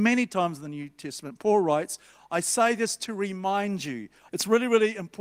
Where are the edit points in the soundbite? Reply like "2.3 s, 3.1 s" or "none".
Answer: 4.3 s

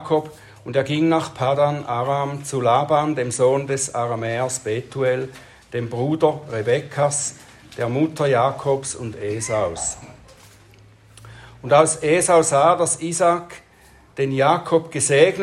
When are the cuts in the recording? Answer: none

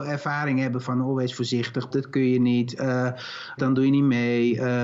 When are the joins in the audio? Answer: 1.9 s, 3.6 s

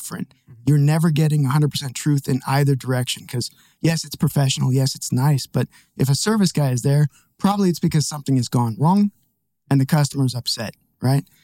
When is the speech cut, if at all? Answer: none

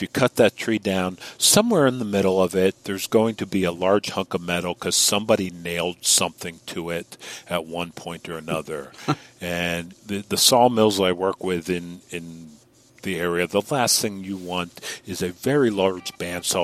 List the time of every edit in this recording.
9.9 s

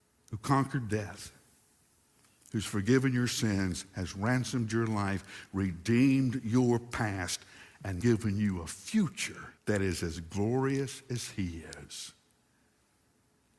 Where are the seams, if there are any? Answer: 8.0 s, 9.6 s

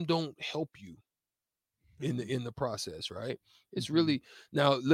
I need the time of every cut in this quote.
none

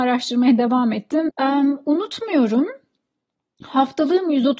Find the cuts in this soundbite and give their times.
1.3 s

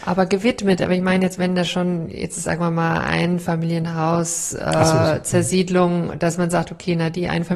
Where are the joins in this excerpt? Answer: none

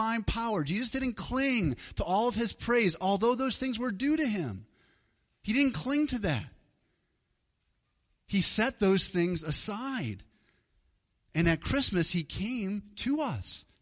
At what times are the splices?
none

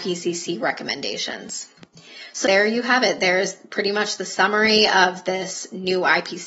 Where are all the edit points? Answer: 2.4 s

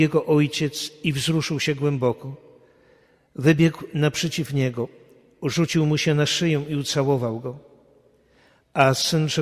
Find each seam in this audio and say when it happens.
none

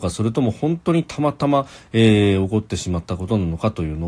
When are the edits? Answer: none

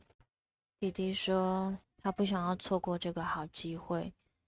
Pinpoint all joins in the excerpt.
1.8 s

